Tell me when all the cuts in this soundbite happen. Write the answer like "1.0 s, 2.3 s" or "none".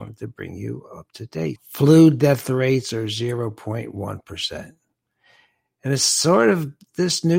1.6 s